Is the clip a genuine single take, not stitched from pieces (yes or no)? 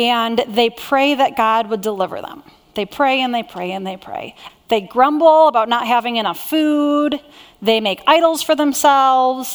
no